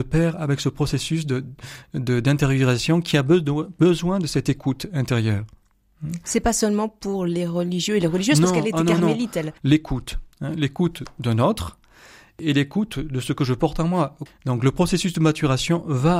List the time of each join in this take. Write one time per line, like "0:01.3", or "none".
0:09.6
0:14.3

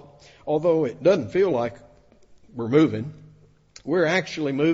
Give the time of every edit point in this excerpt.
none

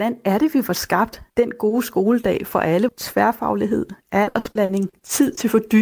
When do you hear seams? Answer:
0:01.3
0:02.9

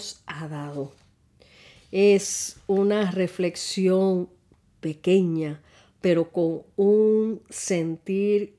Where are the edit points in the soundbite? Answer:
none

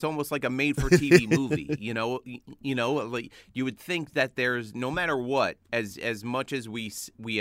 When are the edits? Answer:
0:05.6

